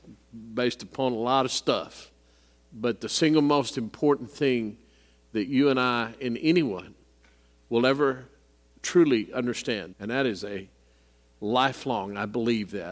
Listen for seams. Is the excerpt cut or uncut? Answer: cut